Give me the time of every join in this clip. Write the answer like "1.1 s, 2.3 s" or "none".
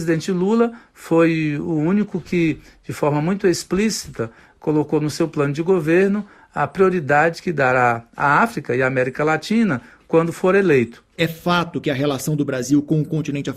none